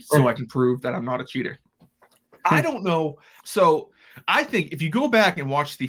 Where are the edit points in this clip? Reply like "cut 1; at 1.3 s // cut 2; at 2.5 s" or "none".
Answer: cut 1; at 3.4 s